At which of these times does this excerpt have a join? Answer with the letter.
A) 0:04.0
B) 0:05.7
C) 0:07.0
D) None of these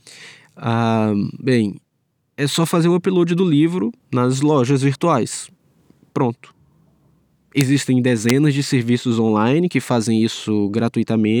A